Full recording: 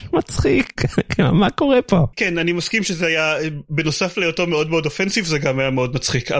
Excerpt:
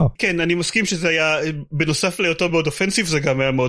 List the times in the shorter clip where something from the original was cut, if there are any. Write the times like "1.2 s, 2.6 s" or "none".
2.5 s

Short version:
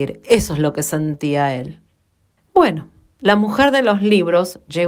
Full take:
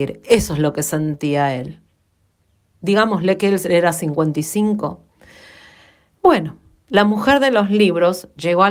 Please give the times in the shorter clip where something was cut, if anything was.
2.4 s

